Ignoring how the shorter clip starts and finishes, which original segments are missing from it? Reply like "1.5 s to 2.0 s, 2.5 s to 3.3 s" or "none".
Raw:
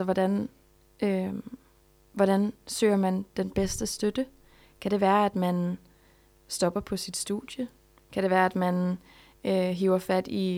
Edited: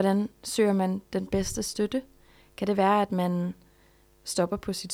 none